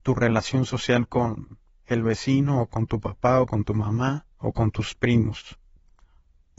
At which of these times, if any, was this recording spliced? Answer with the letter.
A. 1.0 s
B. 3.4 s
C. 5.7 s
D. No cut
D